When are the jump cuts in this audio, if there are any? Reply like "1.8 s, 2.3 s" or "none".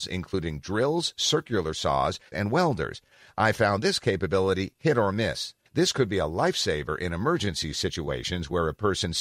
2.3 s, 5.7 s

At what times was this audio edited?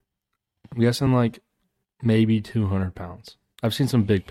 none

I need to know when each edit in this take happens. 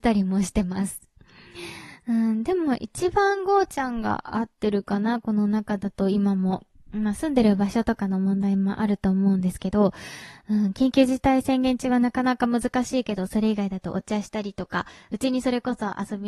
none

